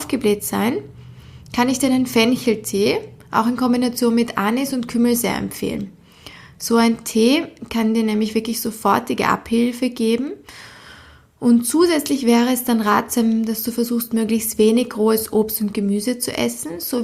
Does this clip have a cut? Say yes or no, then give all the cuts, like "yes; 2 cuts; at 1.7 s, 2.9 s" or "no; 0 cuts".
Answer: no; 0 cuts